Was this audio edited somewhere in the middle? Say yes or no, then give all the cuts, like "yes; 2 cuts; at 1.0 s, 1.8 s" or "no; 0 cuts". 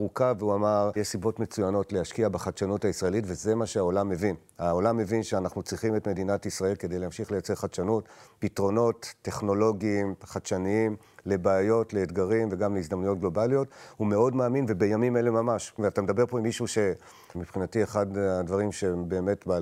yes; 3 cuts; at 1.0 s, 15.8 s, 17.3 s